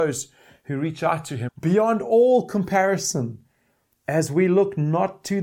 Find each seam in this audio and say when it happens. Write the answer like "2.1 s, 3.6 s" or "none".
1.5 s